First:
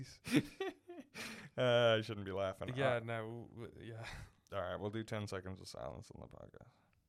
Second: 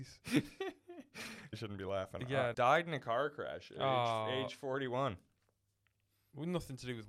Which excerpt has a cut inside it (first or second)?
second